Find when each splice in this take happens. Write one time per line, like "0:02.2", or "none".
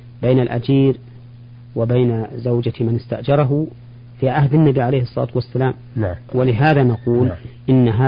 0:06.3